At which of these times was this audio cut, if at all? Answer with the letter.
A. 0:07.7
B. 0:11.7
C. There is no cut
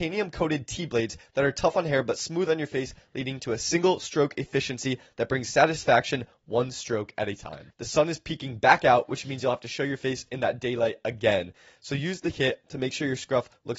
A